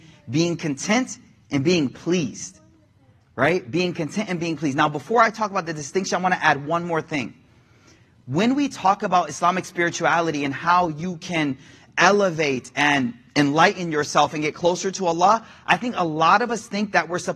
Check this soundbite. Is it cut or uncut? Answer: uncut